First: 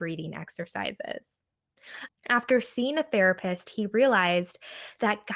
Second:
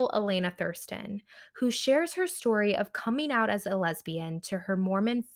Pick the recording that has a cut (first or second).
first